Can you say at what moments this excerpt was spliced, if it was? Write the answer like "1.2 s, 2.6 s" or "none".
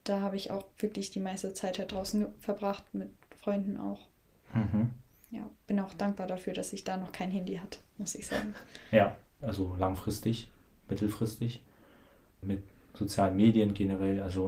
9.4 s, 12.4 s